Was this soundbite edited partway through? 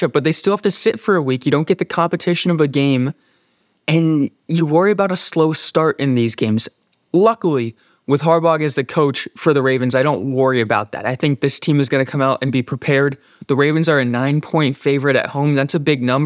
no; 0 cuts

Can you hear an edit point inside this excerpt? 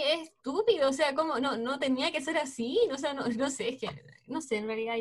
no; 0 cuts

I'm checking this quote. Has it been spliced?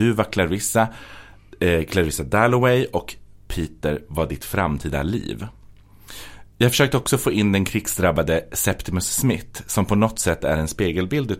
no; 0 cuts

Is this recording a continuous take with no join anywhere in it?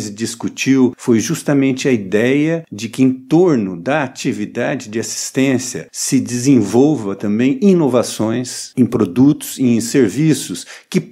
yes; 0 cuts

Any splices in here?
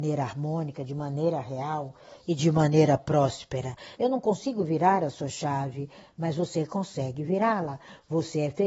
yes; 1 cut; at 4.0 s

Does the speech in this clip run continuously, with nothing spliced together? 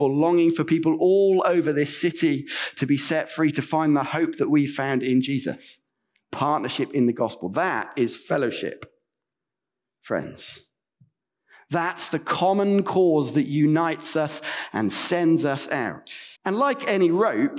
no; 1 cut; at 16.4 s

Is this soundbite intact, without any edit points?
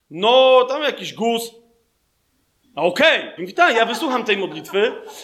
no; 1 cut; at 3.4 s

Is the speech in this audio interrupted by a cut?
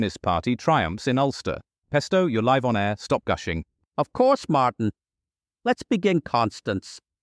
yes; 1 cut; at 1.8 s

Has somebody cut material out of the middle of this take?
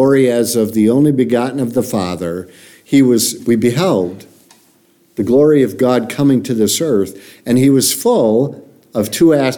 yes; 1 cut; at 3.4 s

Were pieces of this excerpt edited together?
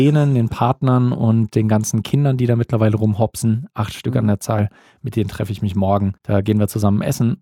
yes; 1 cut; at 6.2 s

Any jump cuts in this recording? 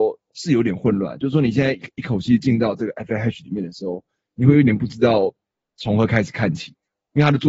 no; 0 cuts

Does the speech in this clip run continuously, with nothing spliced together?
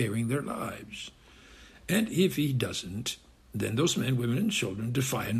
yes; 0 cuts

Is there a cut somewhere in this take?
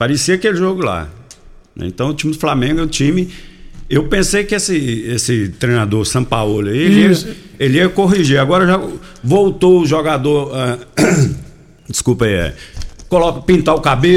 no; 0 cuts

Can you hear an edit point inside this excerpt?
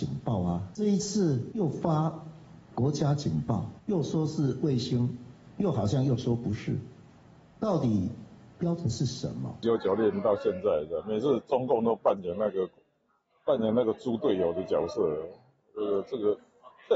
no; 0 cuts

